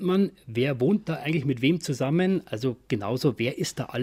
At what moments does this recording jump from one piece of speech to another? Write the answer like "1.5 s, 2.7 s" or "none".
none